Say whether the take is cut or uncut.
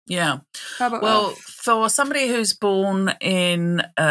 uncut